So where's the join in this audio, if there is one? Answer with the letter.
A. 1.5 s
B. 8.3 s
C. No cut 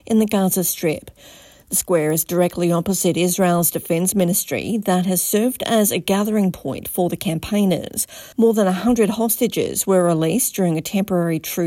B